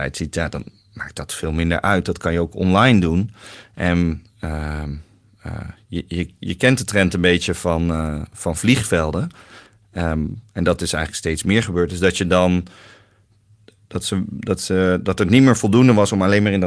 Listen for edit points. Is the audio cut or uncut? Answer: uncut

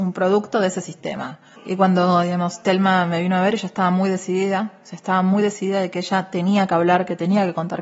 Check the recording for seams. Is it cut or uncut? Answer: cut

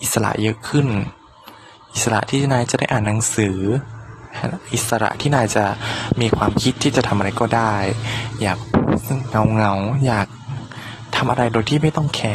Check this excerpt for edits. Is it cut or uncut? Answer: uncut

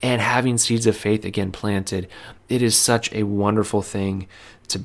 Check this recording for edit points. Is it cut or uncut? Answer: uncut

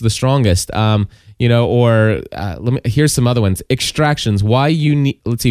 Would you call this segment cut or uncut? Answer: uncut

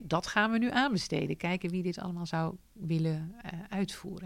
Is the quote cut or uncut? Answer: uncut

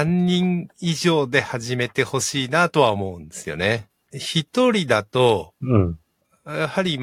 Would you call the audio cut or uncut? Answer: cut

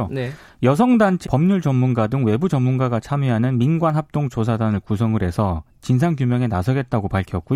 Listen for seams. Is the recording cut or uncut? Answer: cut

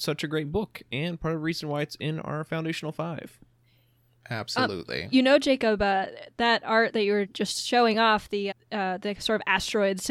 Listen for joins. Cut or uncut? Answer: cut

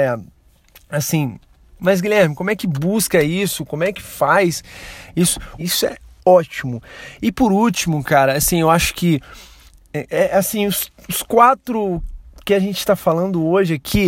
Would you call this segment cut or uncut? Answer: cut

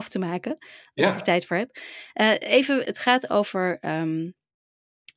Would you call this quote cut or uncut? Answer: cut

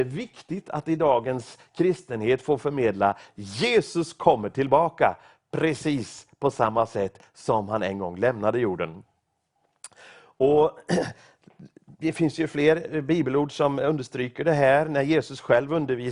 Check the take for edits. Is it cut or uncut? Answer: uncut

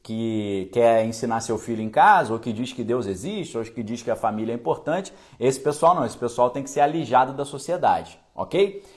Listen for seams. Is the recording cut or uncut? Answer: uncut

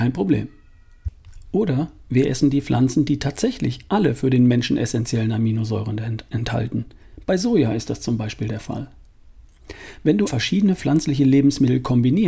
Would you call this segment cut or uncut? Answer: cut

